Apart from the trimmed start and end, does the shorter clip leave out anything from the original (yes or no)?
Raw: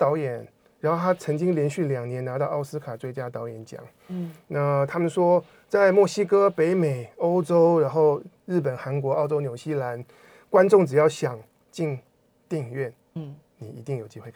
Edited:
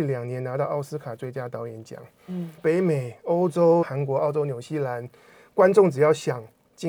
yes